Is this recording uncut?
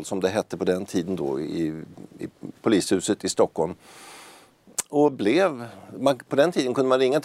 yes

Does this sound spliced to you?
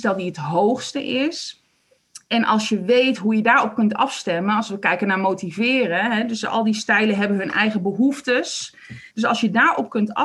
yes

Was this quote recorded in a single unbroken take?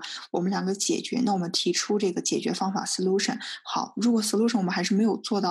yes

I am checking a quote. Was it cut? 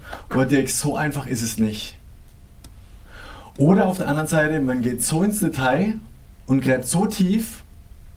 no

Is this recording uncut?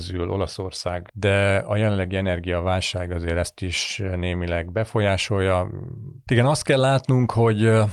no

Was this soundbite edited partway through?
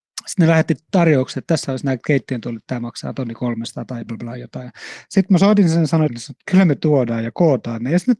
yes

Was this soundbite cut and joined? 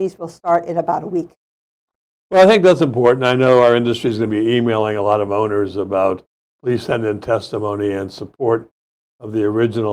no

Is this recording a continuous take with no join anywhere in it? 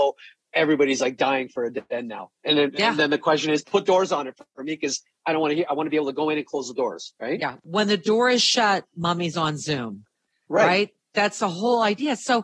yes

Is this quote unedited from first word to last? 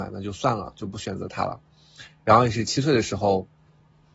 yes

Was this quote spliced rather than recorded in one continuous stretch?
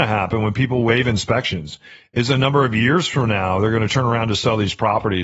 no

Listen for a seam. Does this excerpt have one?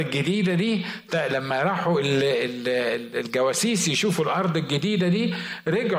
yes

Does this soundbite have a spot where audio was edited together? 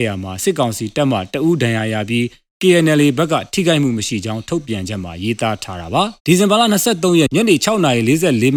yes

